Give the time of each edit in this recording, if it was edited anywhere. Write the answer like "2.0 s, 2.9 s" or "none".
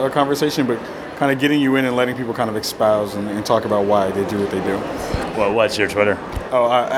5.3 s